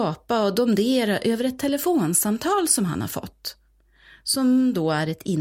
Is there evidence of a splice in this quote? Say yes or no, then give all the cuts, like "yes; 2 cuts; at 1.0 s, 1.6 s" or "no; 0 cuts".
no; 0 cuts